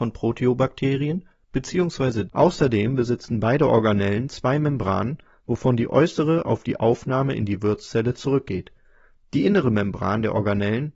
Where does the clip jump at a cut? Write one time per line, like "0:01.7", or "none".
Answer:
0:02.3